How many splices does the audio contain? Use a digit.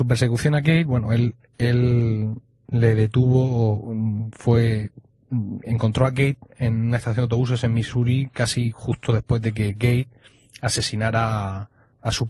0